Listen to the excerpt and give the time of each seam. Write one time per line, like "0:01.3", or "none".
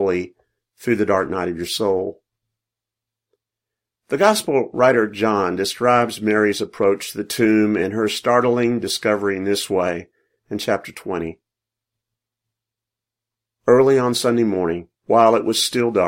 0:15.0

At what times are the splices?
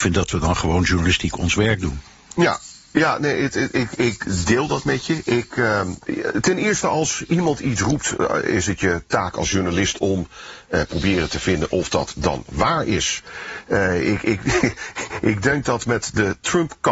0:02.3

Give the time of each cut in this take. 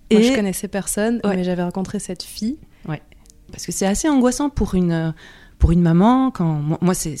0:03.5

